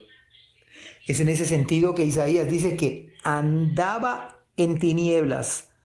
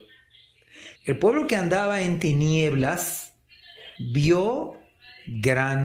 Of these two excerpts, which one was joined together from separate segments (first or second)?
second